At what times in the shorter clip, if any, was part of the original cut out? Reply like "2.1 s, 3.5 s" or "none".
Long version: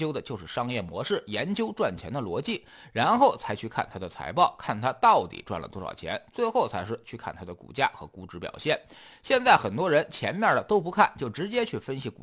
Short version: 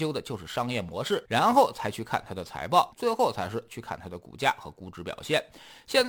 1.2 s, 2.9 s